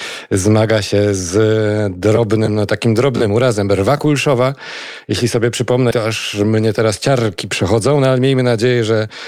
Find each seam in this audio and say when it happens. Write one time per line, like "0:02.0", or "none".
0:05.9